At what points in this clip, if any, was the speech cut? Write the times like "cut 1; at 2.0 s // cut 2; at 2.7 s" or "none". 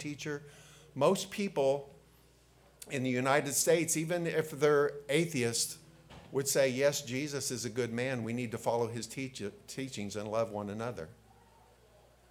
none